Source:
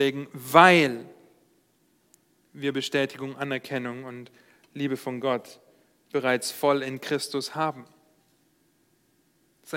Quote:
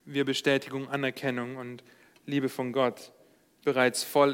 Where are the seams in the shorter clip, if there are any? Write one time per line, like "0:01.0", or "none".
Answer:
none